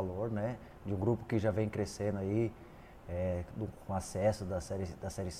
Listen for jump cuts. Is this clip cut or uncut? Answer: uncut